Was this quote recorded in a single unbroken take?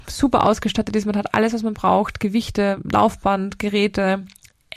yes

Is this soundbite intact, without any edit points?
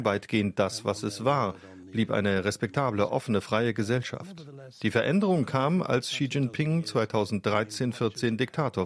yes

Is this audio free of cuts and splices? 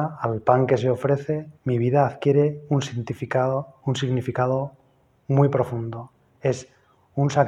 no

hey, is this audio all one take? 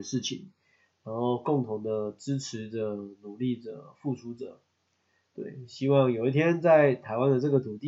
yes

